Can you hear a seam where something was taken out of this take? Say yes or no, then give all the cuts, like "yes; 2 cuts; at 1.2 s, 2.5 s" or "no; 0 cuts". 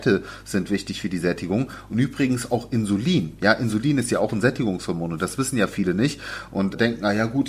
no; 0 cuts